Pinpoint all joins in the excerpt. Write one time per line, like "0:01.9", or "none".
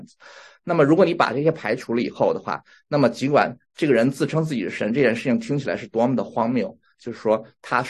0:06.9